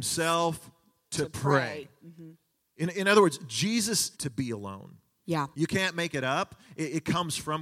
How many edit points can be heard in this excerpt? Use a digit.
2